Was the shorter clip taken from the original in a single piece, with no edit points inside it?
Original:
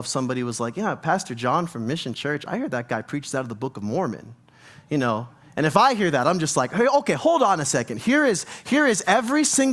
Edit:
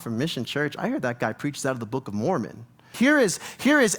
no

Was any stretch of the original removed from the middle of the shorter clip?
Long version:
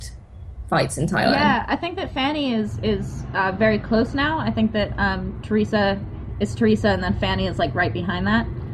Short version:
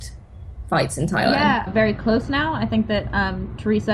yes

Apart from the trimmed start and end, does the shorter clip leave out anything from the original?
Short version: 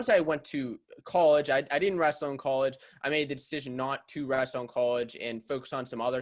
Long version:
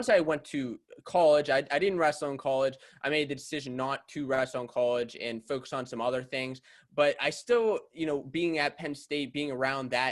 no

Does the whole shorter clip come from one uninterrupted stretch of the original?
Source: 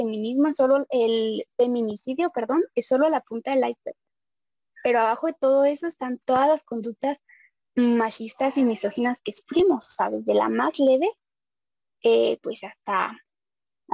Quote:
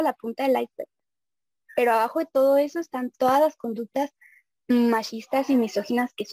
yes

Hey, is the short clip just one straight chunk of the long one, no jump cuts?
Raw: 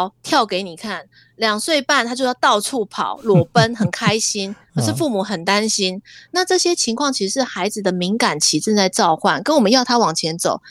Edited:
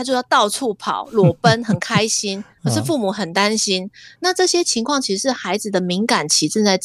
yes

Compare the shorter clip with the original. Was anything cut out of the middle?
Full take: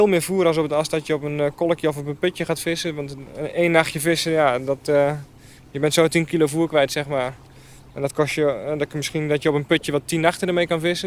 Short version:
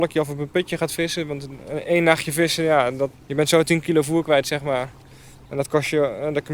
yes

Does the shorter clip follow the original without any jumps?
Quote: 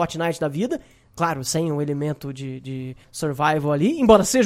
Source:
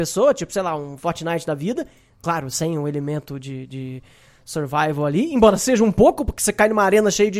no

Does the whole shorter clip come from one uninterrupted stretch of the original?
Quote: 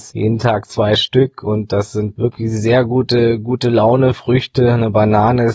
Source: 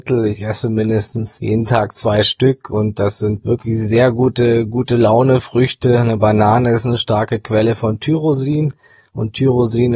yes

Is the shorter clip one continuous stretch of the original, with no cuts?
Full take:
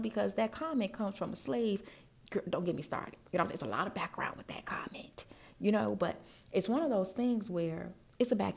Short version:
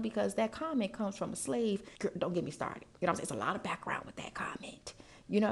no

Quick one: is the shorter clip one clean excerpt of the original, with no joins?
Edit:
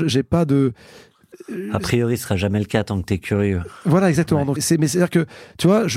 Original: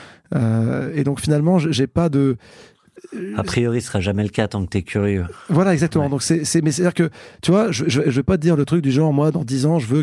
no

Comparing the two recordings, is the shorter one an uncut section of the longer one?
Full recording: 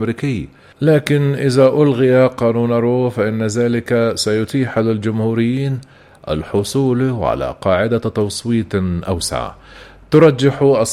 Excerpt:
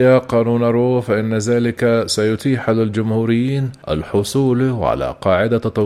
no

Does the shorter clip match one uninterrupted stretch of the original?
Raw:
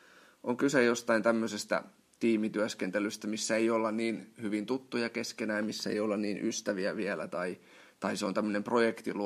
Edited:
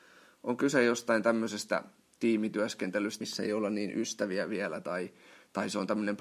no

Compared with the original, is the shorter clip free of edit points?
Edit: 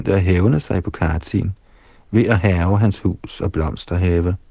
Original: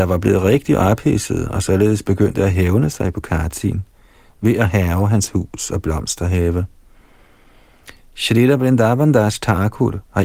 yes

